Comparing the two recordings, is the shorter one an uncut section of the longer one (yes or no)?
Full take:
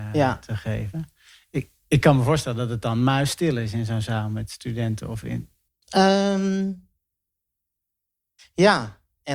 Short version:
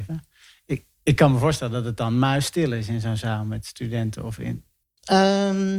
yes